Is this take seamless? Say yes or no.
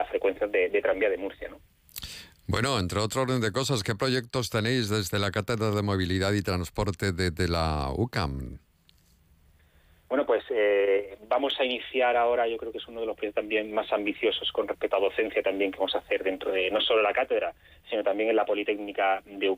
yes